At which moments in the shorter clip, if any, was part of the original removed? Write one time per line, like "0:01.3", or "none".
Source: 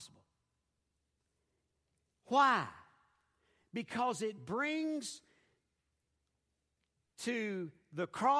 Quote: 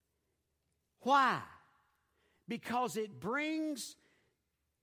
none